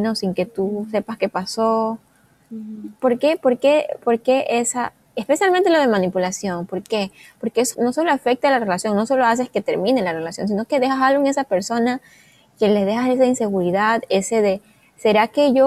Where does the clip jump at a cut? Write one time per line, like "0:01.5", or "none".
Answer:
0:07.7

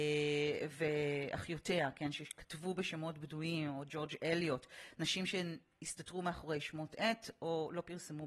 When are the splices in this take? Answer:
none

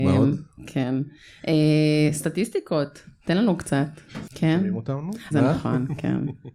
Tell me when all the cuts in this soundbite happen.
0:04.3
0:05.3

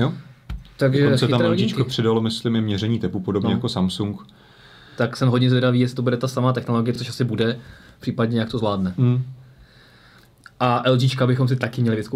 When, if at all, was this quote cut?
none

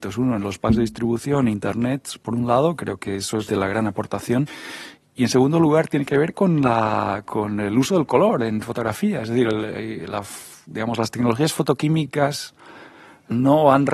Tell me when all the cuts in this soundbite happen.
0:03.5

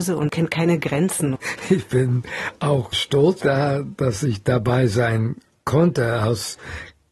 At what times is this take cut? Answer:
0:01.3
0:03.4

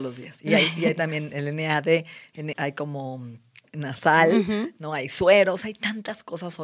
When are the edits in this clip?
0:02.5

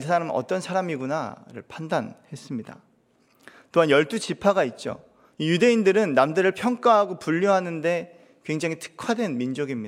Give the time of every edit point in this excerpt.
0:05.3

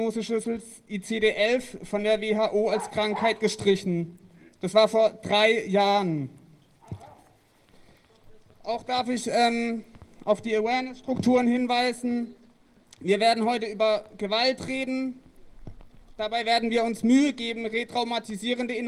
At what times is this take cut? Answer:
none

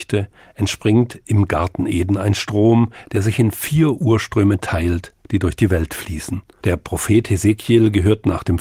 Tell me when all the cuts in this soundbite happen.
0:06.6

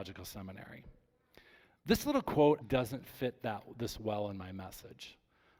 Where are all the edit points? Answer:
0:02.6

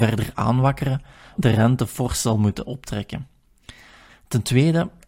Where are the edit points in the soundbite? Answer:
0:01.4
0:04.1

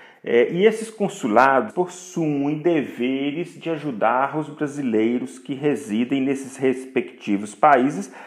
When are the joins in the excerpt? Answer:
0:01.7

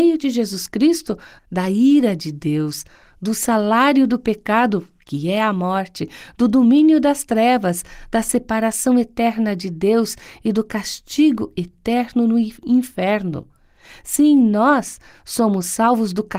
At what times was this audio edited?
0:01.4

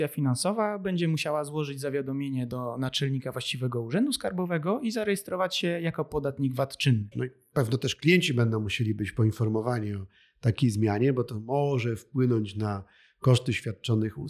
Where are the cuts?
0:07.1

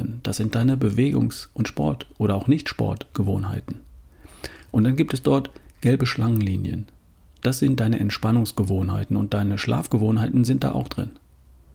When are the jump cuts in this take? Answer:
none

